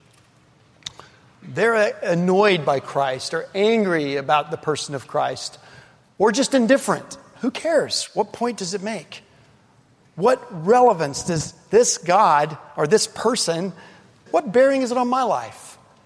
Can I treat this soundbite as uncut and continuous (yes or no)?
no